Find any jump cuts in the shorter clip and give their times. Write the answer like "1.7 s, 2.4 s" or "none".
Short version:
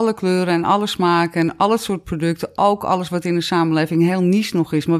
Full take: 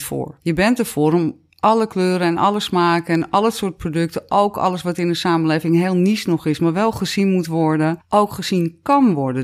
none